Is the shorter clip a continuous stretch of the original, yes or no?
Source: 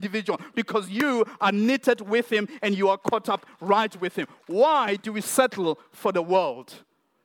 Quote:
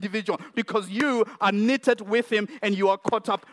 yes